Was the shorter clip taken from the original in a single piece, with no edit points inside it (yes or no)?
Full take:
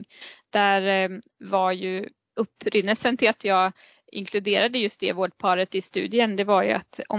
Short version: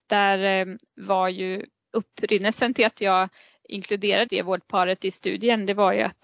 no